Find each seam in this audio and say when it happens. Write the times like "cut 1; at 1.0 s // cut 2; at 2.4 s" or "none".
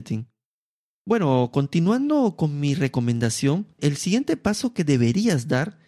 cut 1; at 3.8 s